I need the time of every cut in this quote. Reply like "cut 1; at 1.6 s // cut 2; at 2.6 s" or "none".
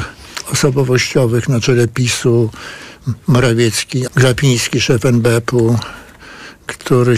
cut 1; at 4.1 s